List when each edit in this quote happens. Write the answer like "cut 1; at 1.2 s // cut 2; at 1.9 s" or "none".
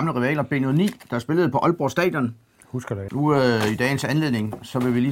cut 1; at 3.1 s